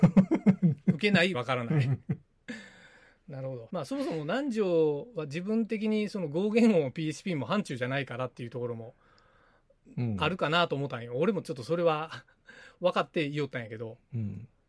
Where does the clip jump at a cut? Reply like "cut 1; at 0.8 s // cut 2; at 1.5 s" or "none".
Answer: cut 1; at 1.3 s // cut 2; at 3.7 s